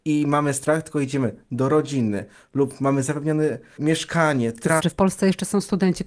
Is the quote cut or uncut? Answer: cut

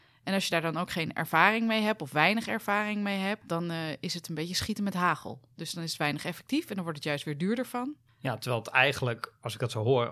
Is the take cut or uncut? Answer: uncut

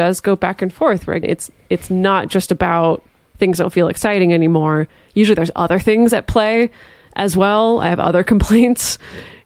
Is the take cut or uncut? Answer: cut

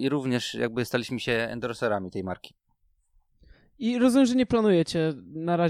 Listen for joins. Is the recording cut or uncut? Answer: uncut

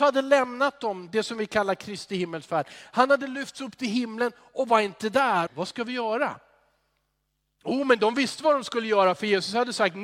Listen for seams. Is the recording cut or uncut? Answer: cut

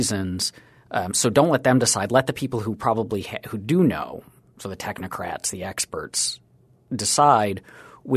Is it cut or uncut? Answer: uncut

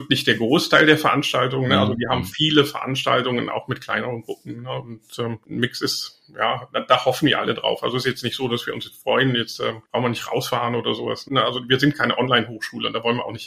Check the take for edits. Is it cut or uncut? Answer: cut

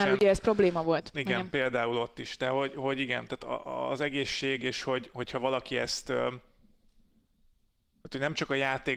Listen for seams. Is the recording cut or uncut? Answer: uncut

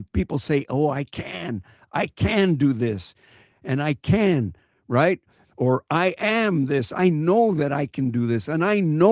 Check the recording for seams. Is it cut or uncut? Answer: uncut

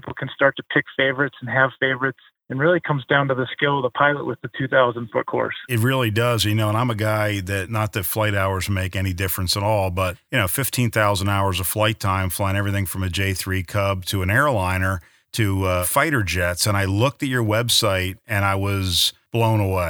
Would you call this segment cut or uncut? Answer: uncut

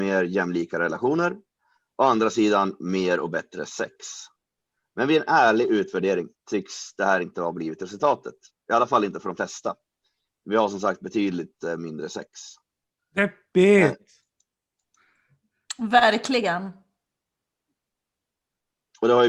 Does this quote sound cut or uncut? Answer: cut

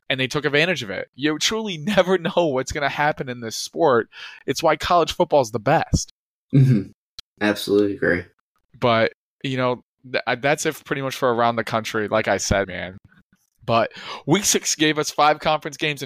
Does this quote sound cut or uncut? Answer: cut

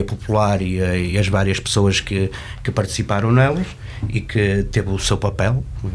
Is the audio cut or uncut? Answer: uncut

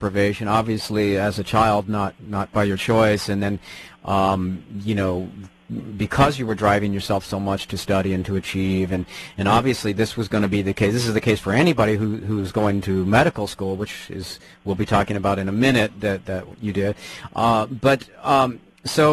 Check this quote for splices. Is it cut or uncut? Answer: uncut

